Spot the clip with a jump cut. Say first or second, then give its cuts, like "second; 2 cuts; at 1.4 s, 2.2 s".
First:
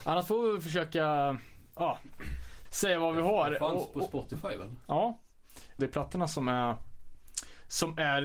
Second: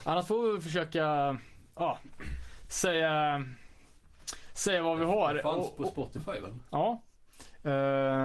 first; 2 cuts; at 2.6 s, 5.8 s